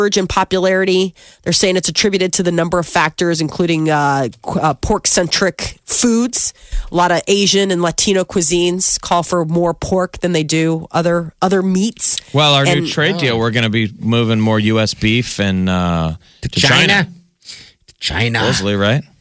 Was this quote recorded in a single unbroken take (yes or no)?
yes